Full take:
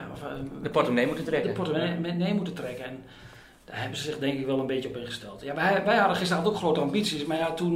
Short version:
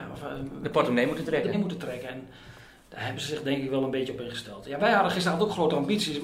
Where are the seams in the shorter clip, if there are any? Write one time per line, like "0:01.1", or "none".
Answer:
0:01.5
0:04.8